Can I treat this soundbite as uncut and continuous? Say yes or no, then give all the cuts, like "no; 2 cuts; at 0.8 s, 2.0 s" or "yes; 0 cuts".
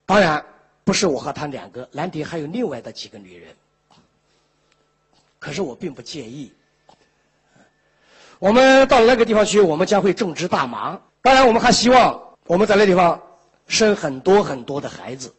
no; 2 cuts; at 11.1 s, 12.3 s